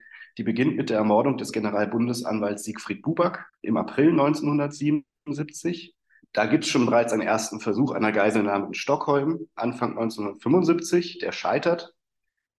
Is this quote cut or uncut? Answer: cut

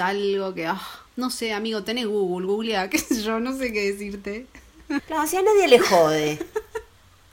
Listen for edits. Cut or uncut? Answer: cut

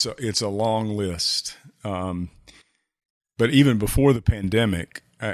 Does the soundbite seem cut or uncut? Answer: uncut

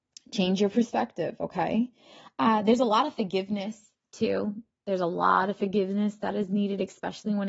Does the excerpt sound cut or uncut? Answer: uncut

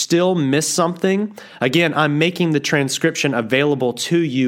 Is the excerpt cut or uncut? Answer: uncut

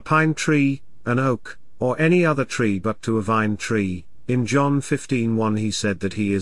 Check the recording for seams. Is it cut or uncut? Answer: uncut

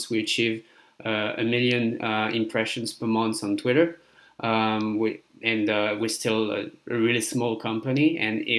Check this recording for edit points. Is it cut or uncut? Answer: uncut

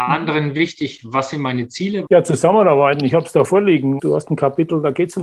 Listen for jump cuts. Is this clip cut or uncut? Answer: cut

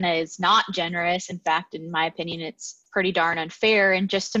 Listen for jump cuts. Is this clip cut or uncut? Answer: uncut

